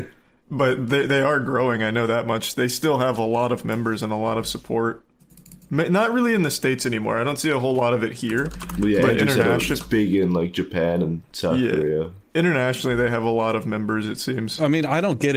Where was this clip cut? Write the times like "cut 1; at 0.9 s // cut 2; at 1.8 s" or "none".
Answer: none